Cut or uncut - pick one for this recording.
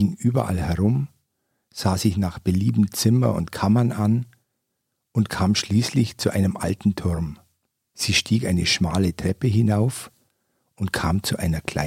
uncut